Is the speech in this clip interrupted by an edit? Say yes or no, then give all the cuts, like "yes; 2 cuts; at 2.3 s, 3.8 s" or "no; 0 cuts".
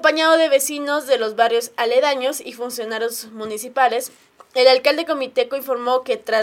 no; 0 cuts